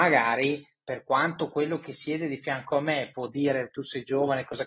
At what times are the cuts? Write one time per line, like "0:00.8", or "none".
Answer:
none